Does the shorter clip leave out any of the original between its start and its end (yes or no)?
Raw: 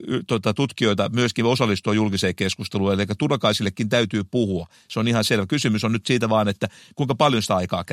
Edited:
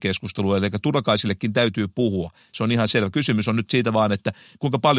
no